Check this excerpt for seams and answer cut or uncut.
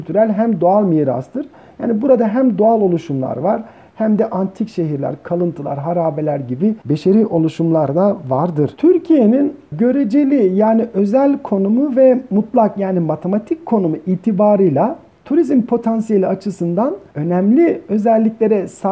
uncut